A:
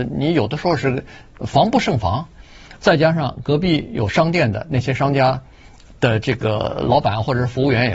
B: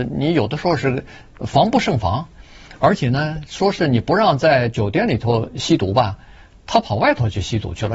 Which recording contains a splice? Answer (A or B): A